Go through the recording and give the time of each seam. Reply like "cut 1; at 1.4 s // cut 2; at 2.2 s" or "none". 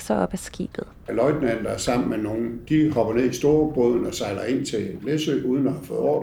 cut 1; at 1.1 s